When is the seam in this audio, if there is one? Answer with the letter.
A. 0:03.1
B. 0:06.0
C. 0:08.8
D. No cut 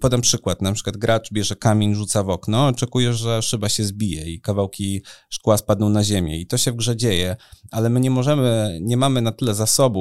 A